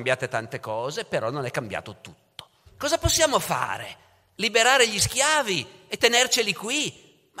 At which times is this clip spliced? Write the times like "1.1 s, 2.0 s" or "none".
2.7 s